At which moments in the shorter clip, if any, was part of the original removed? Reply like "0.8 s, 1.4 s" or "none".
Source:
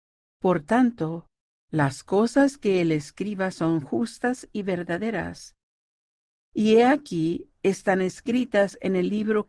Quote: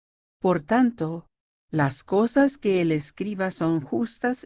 none